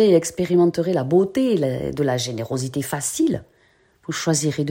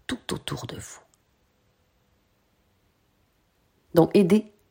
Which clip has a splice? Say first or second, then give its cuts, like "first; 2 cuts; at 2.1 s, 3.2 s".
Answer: second; 1 cut; at 3.7 s